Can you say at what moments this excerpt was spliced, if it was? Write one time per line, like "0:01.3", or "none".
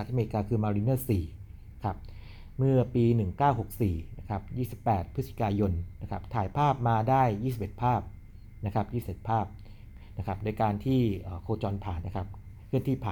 0:12.0